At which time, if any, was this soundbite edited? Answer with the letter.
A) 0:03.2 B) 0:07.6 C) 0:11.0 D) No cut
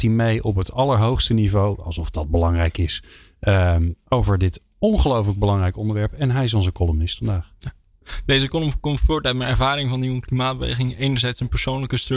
D